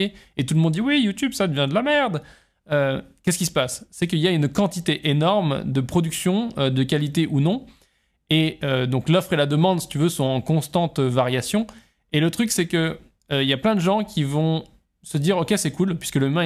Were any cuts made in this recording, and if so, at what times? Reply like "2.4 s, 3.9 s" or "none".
none